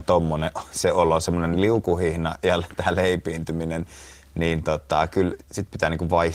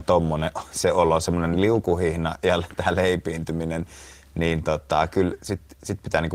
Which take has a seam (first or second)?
first